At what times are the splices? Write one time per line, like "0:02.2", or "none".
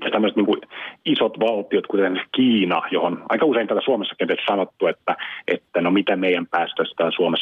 none